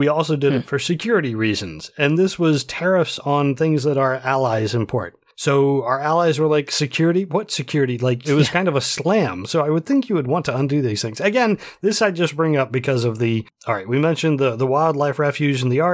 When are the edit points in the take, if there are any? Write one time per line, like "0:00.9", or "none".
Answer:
0:08.2